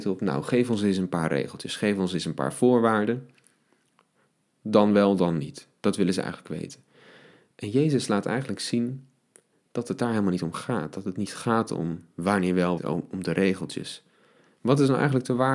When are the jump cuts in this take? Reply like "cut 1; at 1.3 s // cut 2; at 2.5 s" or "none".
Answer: cut 1; at 12.8 s